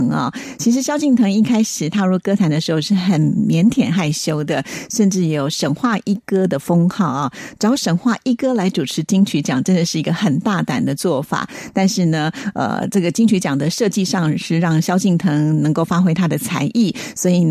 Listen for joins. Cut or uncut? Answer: uncut